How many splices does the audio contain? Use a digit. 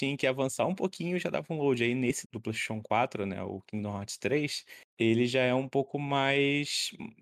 1